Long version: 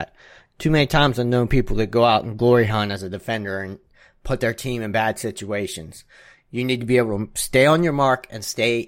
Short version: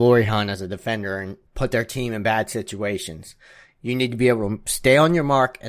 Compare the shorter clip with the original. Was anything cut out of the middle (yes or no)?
yes